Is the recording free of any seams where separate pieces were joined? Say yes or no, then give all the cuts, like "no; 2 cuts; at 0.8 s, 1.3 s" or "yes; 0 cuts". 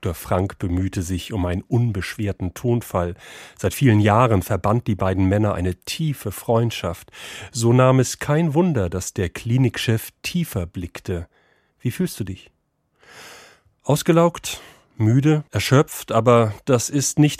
no; 1 cut; at 15.5 s